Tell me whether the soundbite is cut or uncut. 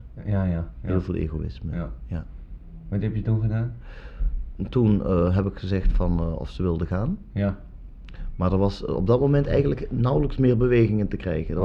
uncut